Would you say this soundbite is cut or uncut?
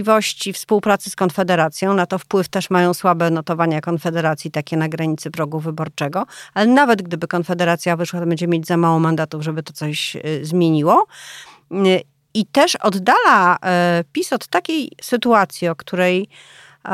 uncut